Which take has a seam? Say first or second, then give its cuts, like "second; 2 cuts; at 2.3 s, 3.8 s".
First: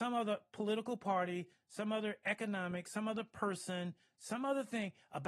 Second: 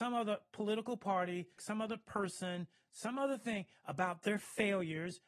second; 1 cut; at 1.6 s